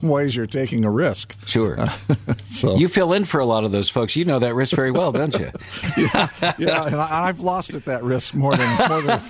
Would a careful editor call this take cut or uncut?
uncut